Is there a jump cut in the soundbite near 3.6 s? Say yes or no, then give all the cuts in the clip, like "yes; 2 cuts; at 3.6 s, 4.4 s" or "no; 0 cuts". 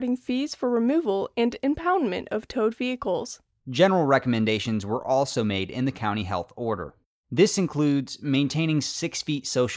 yes; 1 cut; at 3.6 s